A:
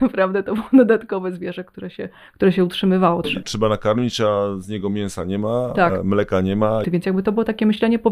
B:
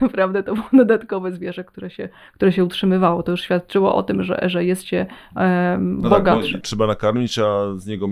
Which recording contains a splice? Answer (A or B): A